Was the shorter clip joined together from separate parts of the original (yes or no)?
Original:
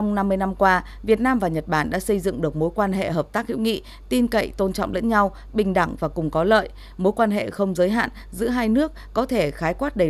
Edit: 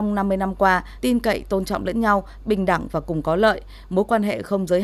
yes